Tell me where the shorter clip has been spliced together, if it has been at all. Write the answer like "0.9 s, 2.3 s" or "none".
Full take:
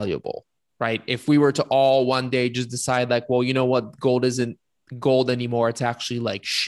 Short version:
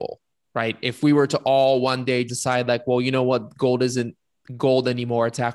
2.3 s